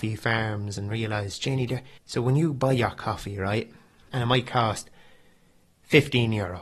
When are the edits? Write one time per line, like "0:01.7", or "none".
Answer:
0:02.0
0:04.1